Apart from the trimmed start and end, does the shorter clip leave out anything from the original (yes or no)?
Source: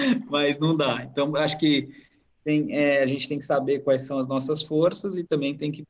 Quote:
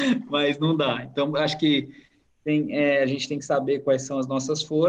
no